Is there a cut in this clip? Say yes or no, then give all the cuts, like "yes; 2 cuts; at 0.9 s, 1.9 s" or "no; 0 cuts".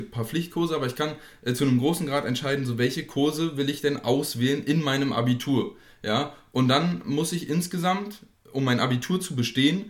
no; 0 cuts